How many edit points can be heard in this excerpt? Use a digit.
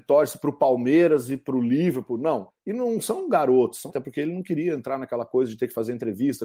2